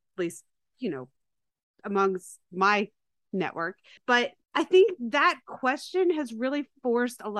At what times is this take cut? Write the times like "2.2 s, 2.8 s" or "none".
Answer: none